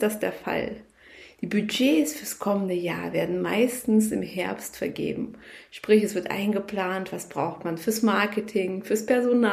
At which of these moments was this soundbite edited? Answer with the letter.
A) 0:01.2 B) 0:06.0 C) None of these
C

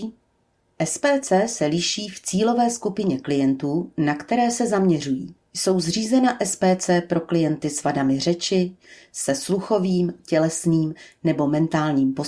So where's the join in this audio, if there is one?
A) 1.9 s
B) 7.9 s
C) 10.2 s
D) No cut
C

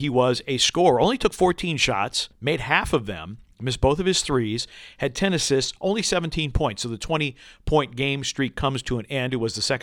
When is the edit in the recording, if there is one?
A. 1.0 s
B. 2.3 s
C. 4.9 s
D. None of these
B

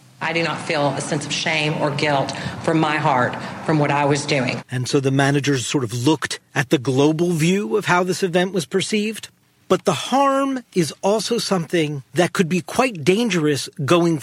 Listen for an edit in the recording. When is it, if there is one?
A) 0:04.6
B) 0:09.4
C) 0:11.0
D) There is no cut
A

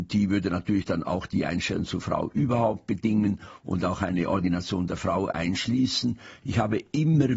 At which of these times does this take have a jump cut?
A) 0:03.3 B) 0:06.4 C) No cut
B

